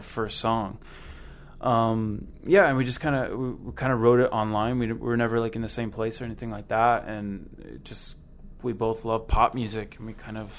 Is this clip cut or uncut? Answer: uncut